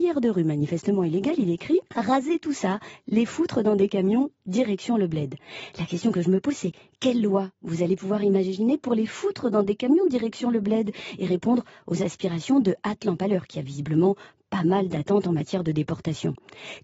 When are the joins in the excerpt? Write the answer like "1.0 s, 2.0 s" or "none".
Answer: 1.9 s